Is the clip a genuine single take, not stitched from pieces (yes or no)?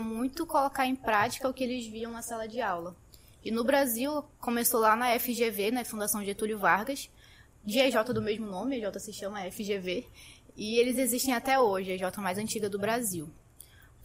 yes